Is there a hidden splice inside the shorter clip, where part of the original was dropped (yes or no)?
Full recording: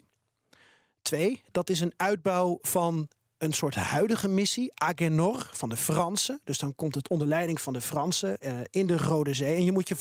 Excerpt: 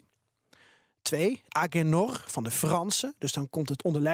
yes